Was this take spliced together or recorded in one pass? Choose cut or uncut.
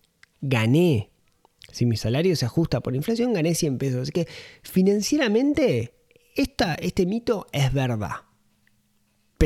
uncut